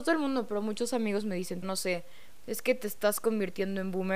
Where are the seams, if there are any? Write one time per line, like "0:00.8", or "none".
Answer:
0:01.6